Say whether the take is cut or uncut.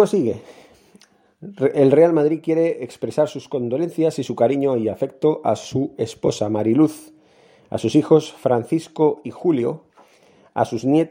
uncut